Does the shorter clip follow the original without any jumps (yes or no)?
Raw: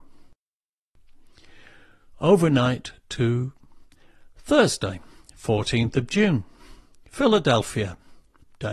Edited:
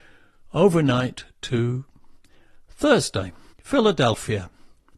no